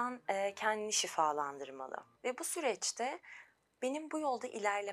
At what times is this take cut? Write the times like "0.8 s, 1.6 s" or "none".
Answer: 2.1 s